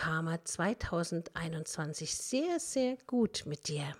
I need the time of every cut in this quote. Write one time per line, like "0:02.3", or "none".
none